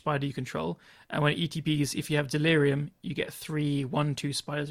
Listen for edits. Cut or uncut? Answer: uncut